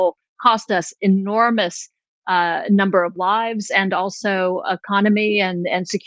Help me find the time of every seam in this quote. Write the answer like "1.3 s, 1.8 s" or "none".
none